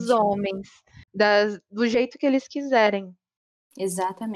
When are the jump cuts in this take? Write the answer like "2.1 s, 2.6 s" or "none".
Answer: 1.1 s